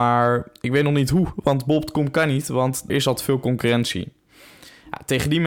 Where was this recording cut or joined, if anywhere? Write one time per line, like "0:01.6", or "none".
0:02.9

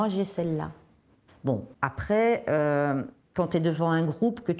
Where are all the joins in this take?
0:01.3

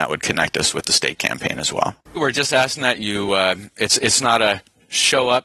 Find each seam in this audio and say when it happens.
0:02.2

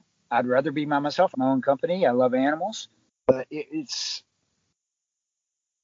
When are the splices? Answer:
0:01.3
0:03.1

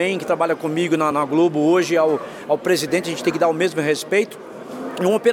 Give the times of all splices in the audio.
0:01.1

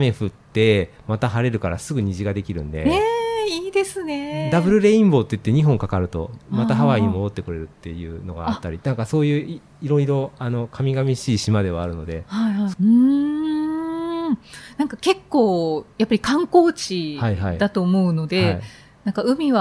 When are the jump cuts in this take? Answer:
0:12.7

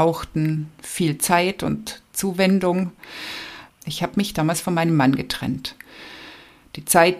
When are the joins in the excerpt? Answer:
0:03.7

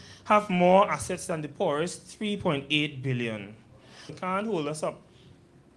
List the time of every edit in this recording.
0:04.1

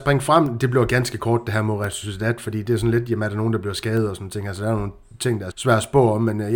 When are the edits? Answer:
0:05.5

